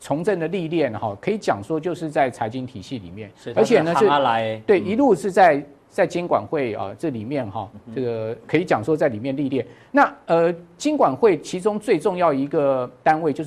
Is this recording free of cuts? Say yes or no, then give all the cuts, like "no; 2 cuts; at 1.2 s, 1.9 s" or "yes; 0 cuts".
yes; 0 cuts